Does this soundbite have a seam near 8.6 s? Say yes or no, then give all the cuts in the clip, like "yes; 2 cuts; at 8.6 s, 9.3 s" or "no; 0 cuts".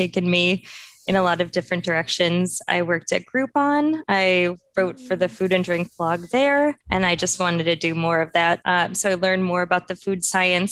yes; 2 cuts; at 6.8 s, 8.6 s